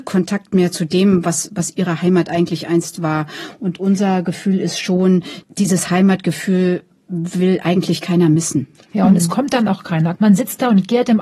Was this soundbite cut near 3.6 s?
no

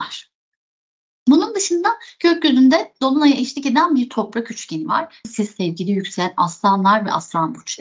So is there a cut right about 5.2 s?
yes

